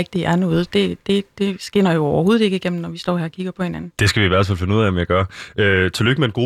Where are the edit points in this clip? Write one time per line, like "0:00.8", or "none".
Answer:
none